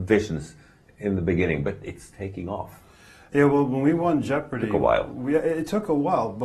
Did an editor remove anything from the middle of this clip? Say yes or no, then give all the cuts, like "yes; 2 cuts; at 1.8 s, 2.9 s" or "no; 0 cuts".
no; 0 cuts